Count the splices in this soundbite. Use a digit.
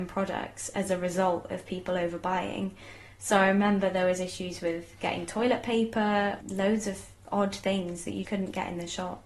2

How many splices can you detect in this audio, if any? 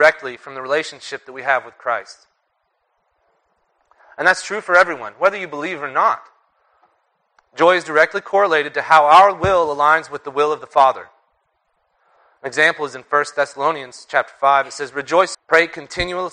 1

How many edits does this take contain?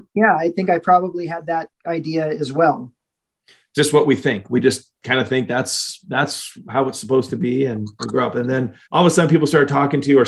2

